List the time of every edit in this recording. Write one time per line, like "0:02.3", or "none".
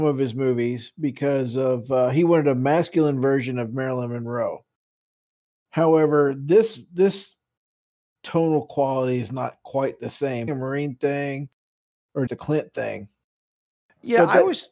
0:10.5
0:12.3

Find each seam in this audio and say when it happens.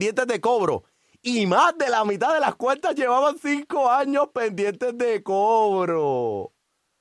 none

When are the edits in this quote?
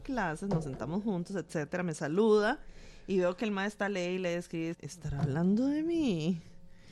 0:04.7

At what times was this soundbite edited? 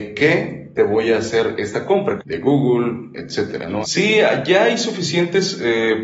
0:02.2
0:03.8

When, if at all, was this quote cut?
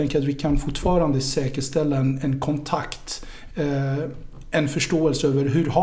0:03.5

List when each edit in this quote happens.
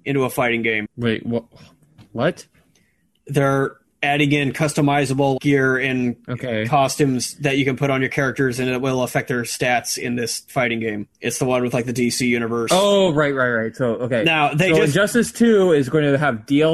0:11.1

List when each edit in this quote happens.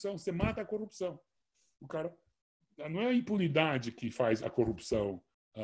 none

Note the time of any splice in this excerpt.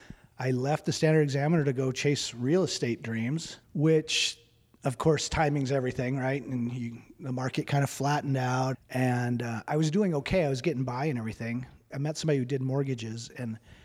0:03.6
0:08.7
0:11.9

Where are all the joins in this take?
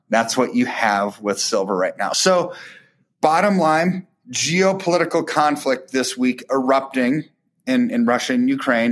none

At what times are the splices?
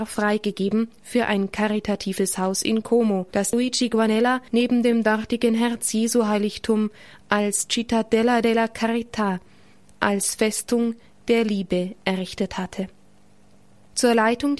0:03.3

